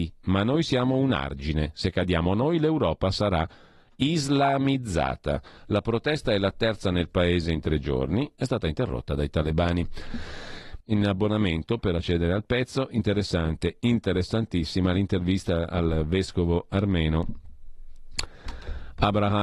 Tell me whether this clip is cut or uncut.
cut